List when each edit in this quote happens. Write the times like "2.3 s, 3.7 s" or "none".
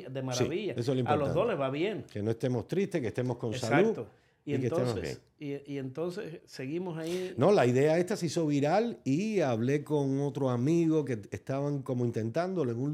6.4 s

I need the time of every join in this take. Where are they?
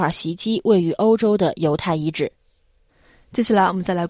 none

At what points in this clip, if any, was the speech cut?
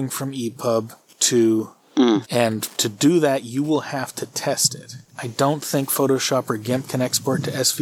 2.2 s, 5.1 s

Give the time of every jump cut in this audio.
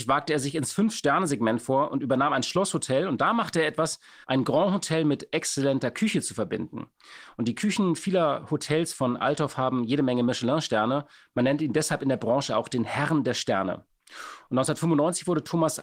4.2 s

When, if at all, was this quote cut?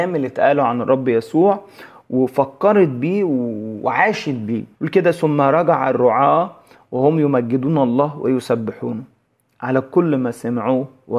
4.7 s

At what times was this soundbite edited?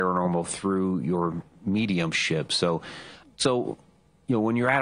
3.2 s

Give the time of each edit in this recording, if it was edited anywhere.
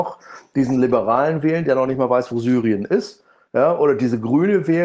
none

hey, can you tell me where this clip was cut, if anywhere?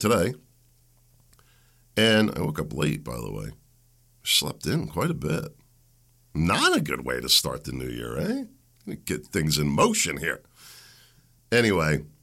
none

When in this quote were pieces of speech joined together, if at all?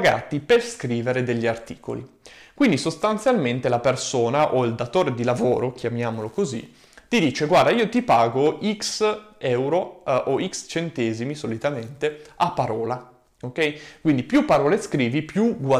none

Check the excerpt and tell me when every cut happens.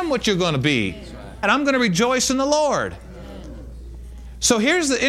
1.4 s

